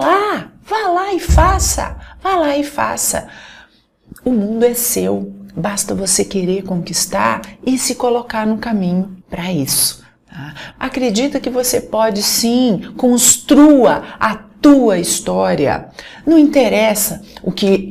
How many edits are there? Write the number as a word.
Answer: two